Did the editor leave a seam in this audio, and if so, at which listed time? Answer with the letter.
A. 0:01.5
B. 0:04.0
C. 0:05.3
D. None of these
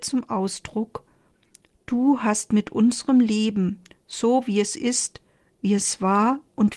D